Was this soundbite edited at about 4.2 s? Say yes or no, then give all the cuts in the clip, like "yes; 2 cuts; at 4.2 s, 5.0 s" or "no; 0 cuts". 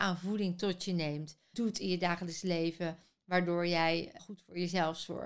yes; 2 cuts; at 1.5 s, 4.2 s